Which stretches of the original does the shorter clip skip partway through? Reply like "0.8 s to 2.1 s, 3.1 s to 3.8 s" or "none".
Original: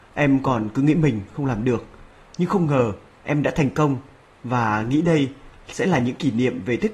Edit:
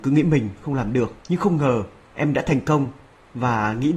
1.9 s to 2.3 s